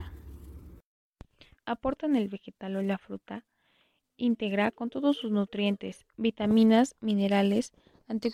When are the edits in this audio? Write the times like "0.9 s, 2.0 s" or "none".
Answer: 1.6 s